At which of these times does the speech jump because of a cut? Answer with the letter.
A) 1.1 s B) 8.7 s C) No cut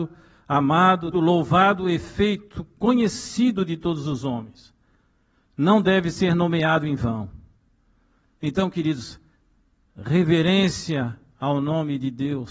A